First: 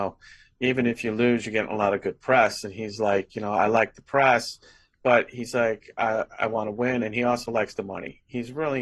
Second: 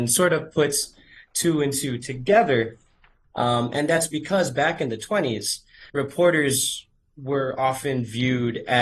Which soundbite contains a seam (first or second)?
second